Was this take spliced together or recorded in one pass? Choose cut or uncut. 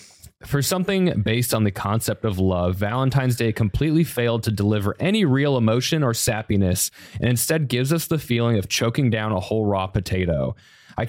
uncut